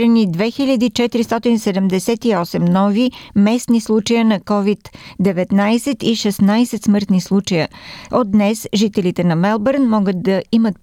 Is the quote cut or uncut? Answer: cut